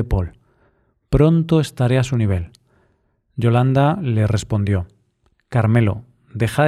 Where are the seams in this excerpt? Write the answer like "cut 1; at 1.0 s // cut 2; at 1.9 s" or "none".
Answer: none